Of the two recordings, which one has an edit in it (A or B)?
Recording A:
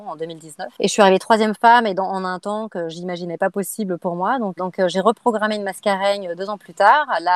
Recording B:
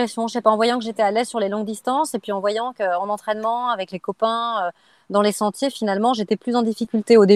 A